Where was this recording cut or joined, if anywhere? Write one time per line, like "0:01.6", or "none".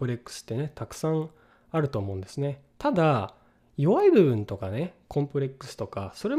none